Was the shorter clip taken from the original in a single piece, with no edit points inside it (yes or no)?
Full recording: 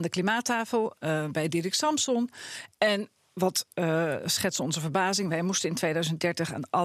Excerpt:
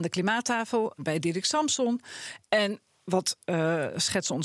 no